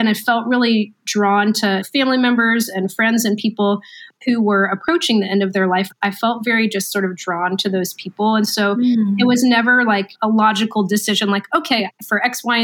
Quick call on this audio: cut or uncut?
uncut